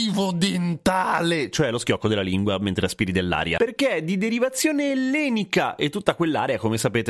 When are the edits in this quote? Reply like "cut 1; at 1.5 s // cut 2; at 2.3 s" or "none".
cut 1; at 3.6 s